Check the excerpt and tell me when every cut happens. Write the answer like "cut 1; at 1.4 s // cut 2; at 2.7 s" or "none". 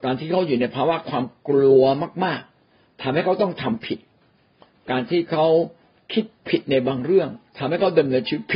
none